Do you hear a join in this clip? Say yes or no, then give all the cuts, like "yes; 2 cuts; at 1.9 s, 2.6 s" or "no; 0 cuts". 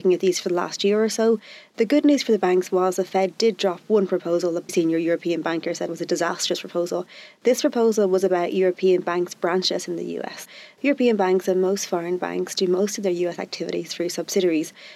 yes; 1 cut; at 4.7 s